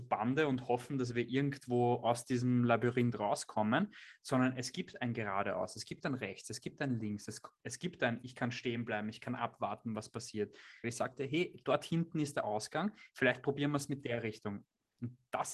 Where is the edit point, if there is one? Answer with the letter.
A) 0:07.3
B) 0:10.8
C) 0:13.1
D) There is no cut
B